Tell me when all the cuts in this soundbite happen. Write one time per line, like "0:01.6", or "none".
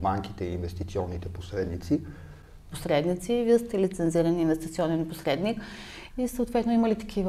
0:02.7
0:06.1

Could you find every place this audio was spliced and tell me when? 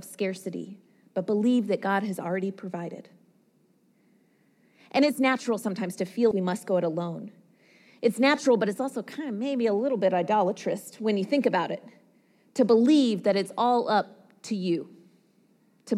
0:06.3

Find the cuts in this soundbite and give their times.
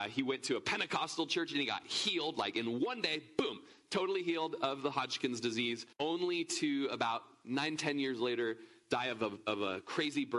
0:05.9

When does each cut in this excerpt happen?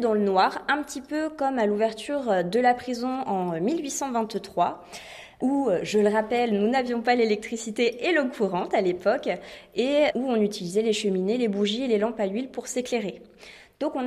none

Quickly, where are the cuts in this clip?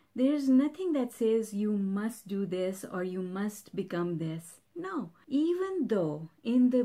none

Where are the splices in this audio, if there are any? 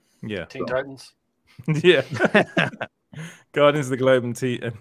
none

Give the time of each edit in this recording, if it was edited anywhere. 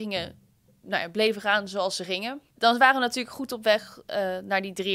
0:02.6

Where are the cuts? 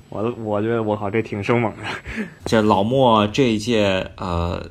0:02.4

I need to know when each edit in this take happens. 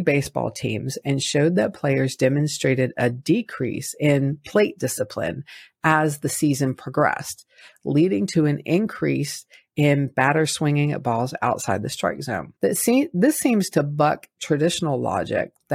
0:12.6

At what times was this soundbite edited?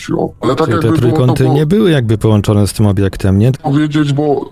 0:03.5

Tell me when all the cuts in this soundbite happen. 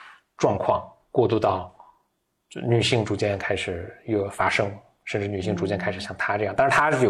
none

